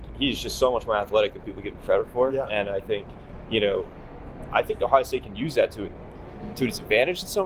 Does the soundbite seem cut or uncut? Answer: uncut